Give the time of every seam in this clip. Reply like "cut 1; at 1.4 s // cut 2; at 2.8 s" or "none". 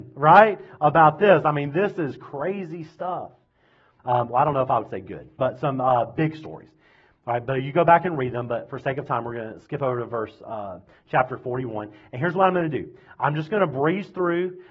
cut 1; at 4.0 s